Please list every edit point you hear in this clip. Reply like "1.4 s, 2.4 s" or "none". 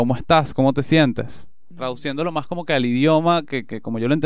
1.7 s